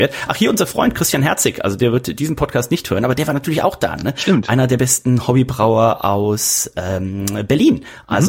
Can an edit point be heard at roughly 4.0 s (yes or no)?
no